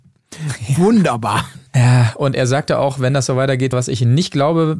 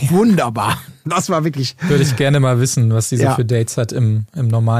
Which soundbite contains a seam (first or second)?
first